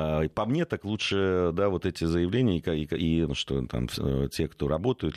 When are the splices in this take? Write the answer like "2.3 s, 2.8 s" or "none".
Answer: 3.3 s